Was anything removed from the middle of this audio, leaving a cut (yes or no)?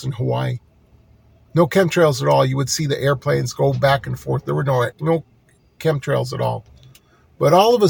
yes